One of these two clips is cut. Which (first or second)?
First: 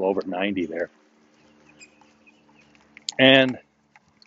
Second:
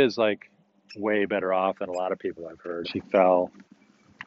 second